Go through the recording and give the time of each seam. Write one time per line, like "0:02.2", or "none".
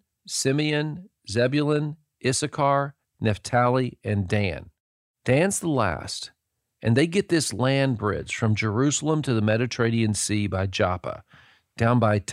0:03.1